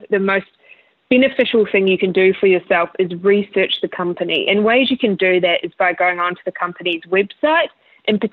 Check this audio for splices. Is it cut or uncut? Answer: uncut